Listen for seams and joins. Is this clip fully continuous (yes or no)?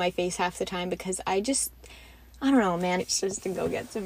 no